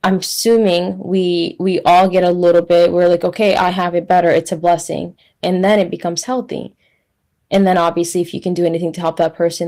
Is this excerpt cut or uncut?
cut